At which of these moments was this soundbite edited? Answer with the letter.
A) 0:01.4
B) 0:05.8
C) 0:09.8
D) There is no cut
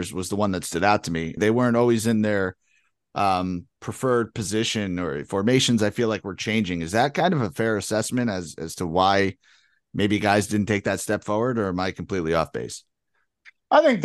A